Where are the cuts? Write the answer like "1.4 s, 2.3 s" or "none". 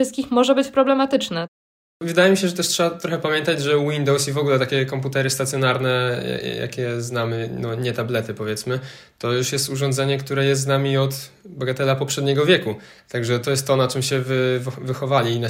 13.4 s